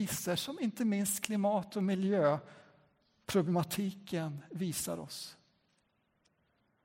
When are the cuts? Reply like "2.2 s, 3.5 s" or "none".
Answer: none